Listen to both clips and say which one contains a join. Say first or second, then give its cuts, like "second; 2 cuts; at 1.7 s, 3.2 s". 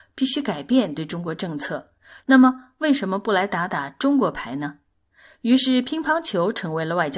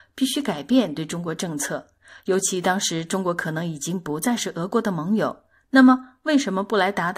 first; 1 cut; at 2.2 s